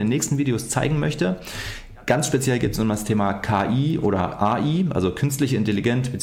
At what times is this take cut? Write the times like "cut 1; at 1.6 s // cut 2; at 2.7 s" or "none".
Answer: none